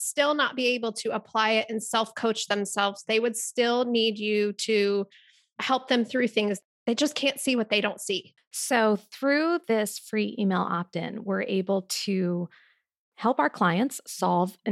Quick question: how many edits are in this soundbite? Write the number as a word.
one